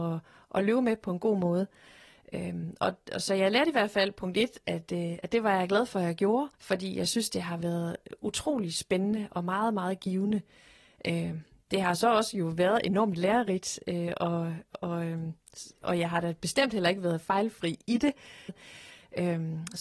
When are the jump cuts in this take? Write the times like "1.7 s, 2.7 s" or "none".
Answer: 6.5 s, 18.5 s

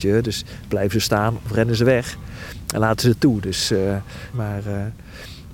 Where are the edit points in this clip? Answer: 4.3 s

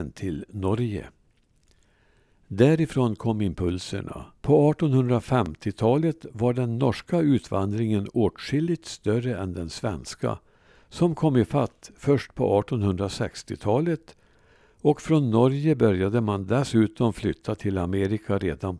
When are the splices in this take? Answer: 4.4 s

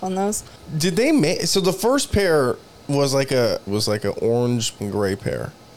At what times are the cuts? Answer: 3.7 s, 4.8 s

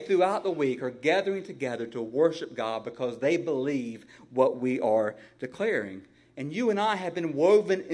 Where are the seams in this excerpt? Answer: none

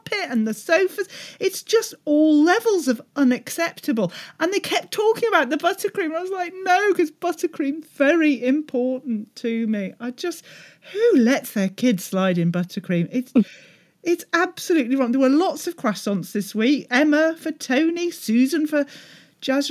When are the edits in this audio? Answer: none

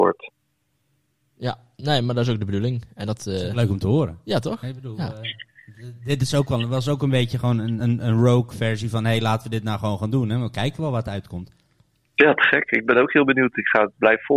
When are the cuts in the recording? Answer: none

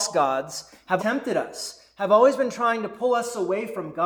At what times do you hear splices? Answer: 1.0 s

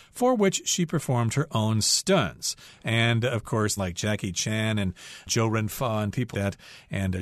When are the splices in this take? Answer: 2.7 s, 3.8 s, 6.3 s

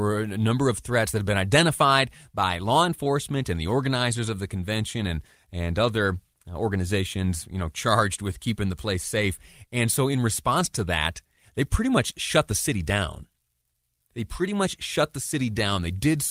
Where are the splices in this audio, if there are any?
none

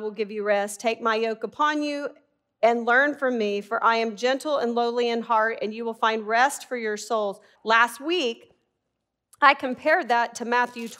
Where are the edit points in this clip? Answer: 7.6 s

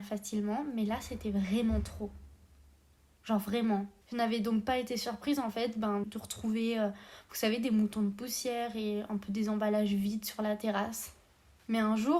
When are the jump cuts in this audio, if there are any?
4.0 s, 6.0 s

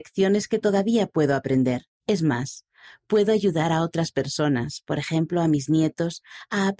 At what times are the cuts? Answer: 2.0 s

